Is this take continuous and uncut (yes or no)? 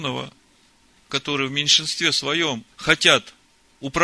no